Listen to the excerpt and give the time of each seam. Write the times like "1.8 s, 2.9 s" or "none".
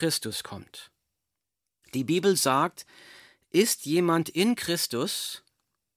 1.8 s